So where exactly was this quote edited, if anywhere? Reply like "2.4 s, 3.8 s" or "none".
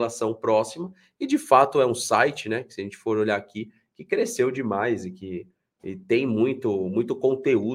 none